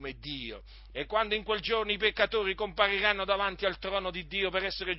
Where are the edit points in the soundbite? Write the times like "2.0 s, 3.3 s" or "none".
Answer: 0.9 s